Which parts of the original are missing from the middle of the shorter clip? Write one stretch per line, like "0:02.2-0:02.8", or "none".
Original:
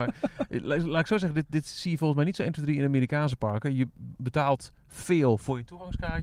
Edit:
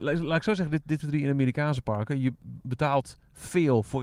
0:01.6-0:02.5